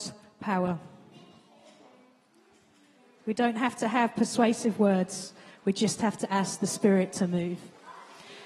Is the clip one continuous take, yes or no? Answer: yes